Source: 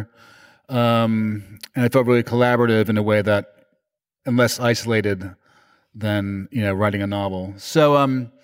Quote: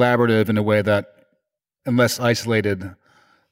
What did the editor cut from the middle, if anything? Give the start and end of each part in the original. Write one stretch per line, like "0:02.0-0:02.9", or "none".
none